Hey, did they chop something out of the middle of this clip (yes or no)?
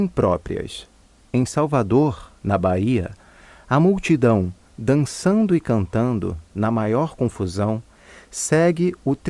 no